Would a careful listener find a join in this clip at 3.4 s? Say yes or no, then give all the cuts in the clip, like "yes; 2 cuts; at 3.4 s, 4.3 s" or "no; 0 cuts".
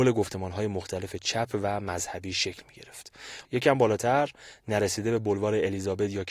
yes; 1 cut; at 3.4 s